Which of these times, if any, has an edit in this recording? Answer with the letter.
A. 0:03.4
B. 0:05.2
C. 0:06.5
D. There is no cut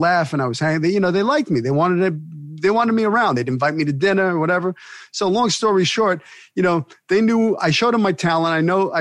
D